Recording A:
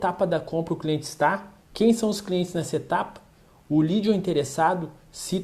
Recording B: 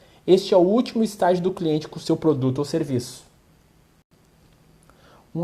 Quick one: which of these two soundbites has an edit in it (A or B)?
A